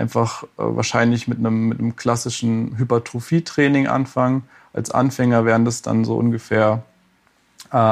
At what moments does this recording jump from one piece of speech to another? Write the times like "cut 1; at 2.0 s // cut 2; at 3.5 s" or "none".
cut 1; at 2.7 s